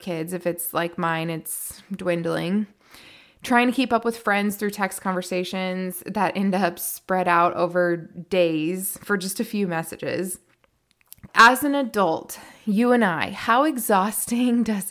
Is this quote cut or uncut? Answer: cut